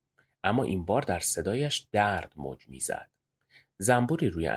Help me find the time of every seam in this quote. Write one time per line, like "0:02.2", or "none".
none